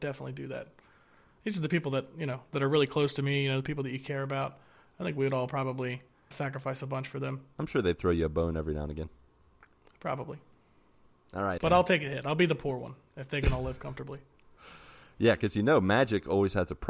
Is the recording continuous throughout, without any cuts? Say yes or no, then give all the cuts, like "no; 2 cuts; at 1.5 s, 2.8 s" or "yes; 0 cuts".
no; 2 cuts; at 6.3 s, 11.6 s